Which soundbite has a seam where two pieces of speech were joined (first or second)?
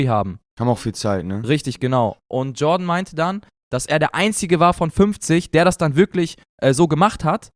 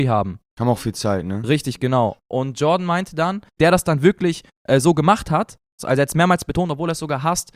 second